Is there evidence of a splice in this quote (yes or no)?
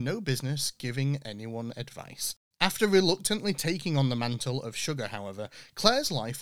no